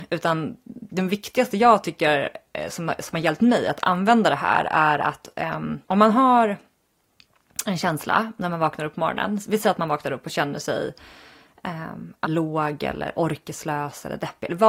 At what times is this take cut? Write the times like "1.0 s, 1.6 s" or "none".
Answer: 5.8 s, 12.2 s